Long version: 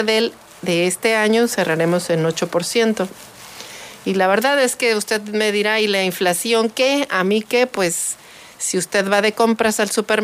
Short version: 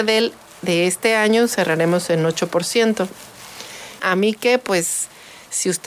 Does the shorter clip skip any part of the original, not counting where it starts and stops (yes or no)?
yes